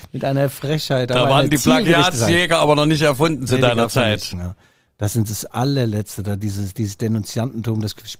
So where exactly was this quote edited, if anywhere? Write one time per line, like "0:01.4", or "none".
0:04.3